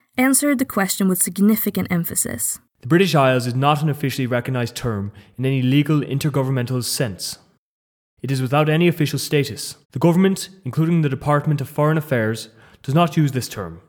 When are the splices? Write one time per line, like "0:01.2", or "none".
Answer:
0:09.8

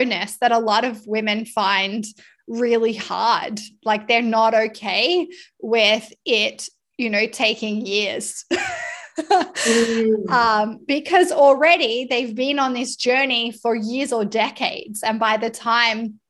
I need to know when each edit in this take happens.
none

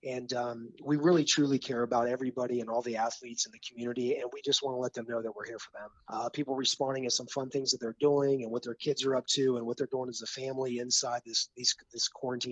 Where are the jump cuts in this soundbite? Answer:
0:06.1

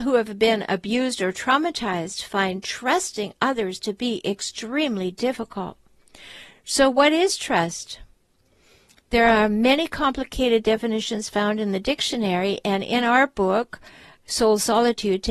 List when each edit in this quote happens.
none

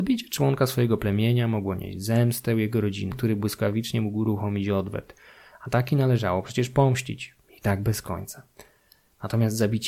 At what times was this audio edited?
0:03.1

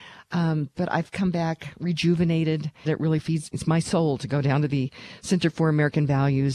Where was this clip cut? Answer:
0:02.9

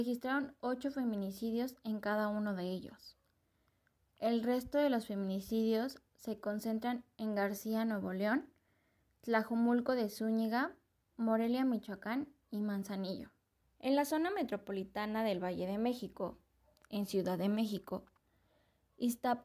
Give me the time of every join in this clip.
0:11.1
0:13.6

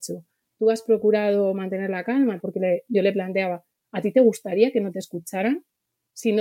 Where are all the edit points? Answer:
0:02.4

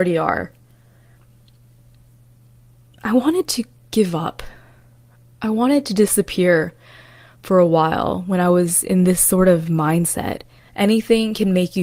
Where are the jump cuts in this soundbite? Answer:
0:10.6

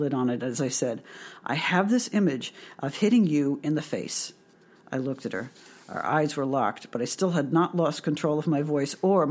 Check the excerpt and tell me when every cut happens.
none

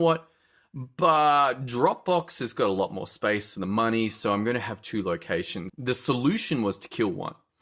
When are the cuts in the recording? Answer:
0:05.7

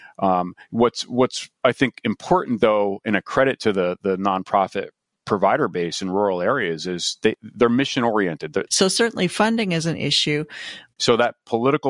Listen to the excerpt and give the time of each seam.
0:08.7
0:11.0

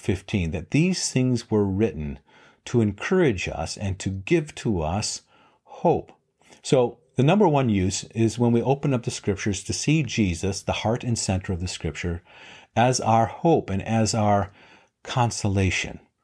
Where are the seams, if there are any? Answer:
none

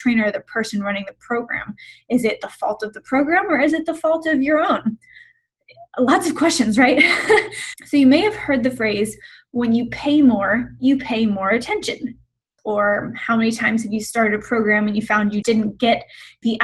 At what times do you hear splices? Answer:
0:07.7
0:12.6
0:15.4

